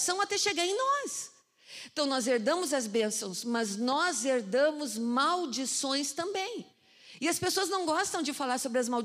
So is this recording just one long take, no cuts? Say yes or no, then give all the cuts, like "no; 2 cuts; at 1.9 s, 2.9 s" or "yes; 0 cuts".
yes; 0 cuts